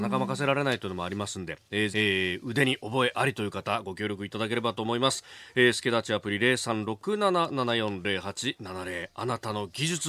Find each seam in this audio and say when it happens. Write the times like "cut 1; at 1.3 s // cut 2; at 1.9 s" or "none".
cut 1; at 1.9 s